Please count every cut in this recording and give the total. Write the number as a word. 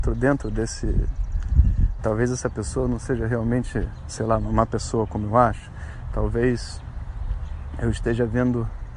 one